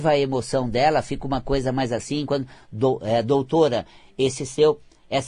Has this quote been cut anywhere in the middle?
no; 0 cuts

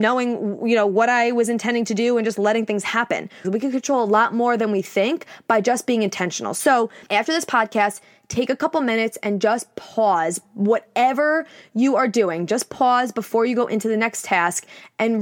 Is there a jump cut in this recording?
yes; 1 cut; at 3.4 s

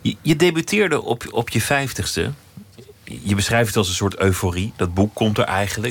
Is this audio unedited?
yes; 0 cuts

